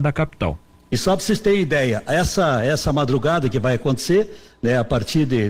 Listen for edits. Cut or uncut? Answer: uncut